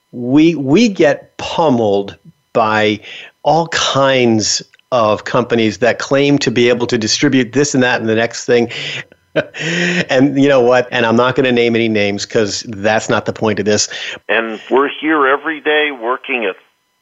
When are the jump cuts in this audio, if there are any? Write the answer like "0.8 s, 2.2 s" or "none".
9.0 s, 10.9 s, 14.2 s